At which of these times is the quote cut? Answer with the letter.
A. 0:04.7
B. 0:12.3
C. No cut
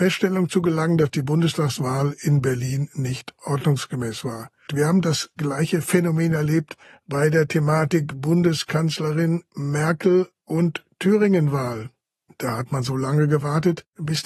A